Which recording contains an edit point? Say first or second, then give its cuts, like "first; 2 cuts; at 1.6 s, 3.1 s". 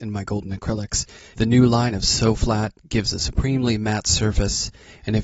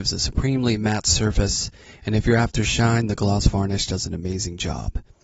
first; 1 cut; at 1.3 s